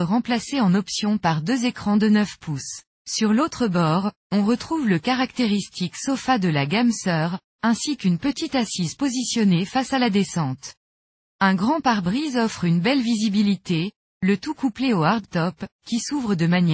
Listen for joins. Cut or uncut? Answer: cut